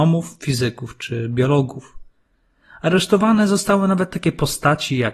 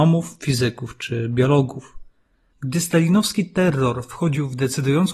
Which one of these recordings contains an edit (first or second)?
second